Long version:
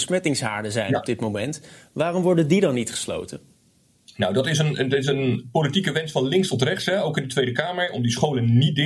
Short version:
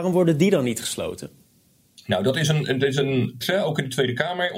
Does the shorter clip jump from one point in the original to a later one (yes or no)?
yes